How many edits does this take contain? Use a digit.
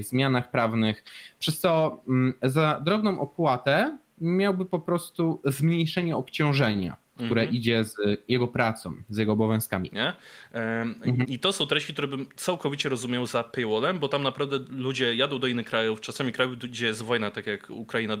2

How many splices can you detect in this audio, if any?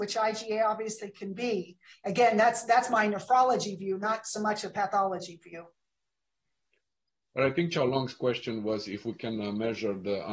1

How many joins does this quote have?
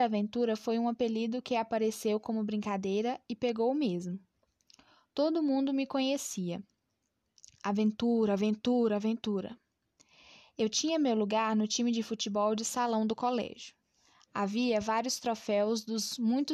0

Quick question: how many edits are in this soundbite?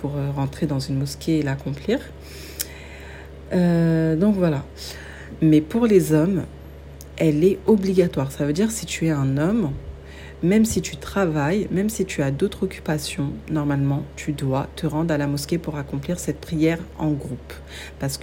0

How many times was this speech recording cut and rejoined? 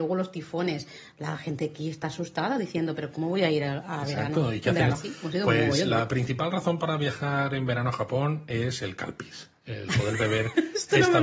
1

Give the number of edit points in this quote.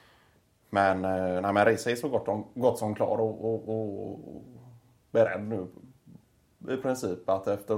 0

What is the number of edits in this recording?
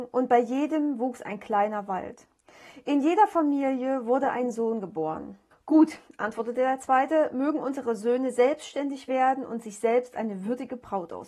1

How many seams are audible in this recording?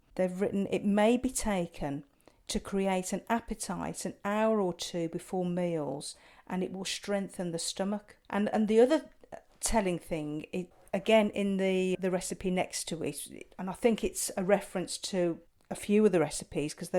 2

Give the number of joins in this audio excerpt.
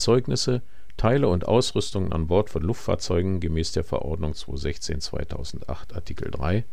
0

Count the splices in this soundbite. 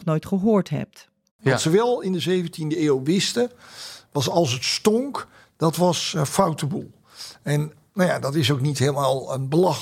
1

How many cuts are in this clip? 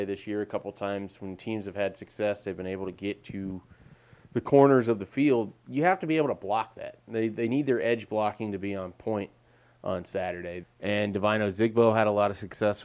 1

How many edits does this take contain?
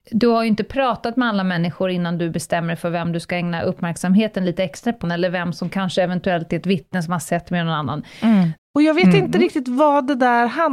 2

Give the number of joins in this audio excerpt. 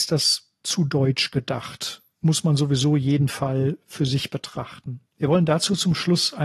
1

